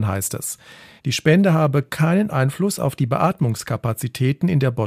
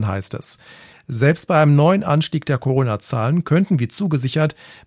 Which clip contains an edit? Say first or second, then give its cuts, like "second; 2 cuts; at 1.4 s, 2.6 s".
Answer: second; 1 cut; at 0.9 s